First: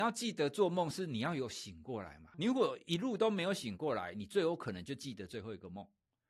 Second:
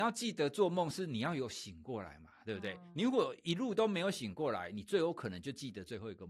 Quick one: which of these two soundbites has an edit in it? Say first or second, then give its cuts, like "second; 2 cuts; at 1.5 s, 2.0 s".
first; 1 cut; at 2.3 s